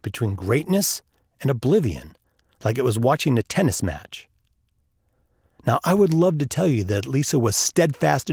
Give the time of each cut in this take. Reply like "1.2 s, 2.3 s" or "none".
none